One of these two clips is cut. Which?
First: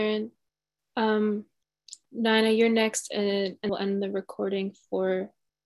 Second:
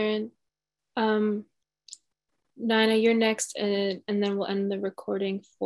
first; 2 cuts; at 2.0 s, 3.7 s

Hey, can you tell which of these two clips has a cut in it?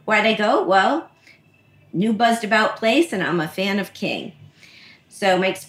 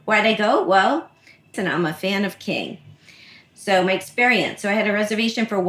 second; 1 cut; at 1.5 s

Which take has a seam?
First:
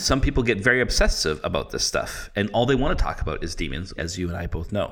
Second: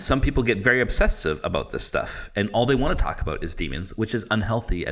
first; 1 cut; at 4.0 s

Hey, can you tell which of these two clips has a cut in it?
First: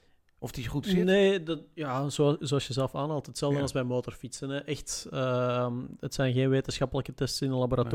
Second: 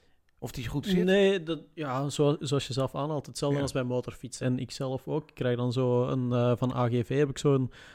second; 1 cut; at 4.4 s

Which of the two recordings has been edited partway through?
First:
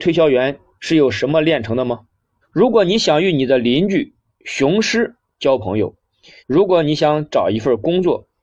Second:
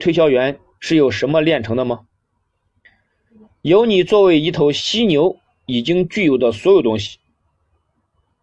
first; 2 cuts; at 2.4 s, 6.4 s

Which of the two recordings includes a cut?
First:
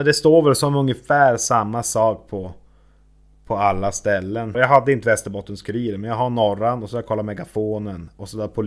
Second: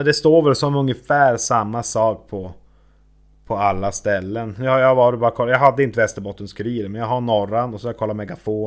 first; 1 cut; at 4.5 s

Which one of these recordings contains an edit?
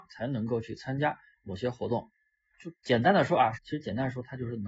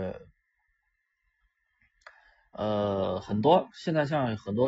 first; 2 cuts; at 2.5 s, 3.6 s

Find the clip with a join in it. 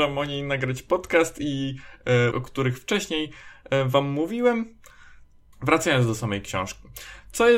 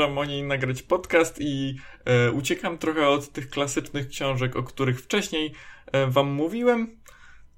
first; 2 cuts; at 2.3 s, 5.5 s

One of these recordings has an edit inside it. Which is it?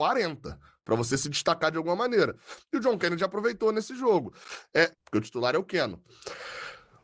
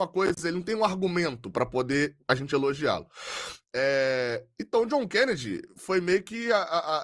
first; 1 cut; at 4.9 s

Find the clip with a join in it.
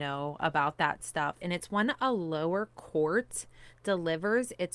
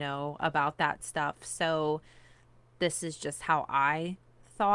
first; 1 cut; at 1.4 s

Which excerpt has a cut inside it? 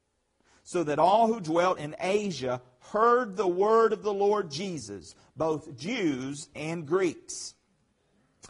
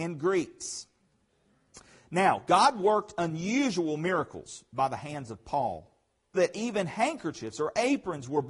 second; 1 cut; at 6.4 s

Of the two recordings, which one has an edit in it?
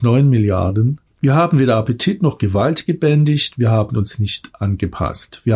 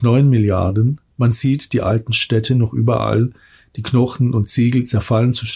first; 1 cut; at 1.1 s

